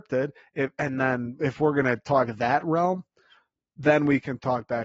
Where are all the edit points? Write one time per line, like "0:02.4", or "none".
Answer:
none